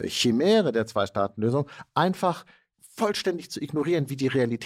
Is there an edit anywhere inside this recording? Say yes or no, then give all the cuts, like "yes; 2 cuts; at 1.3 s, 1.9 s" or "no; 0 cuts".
no; 0 cuts